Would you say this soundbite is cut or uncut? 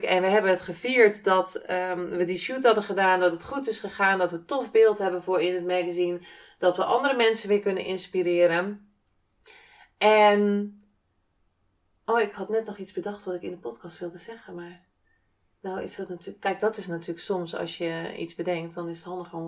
uncut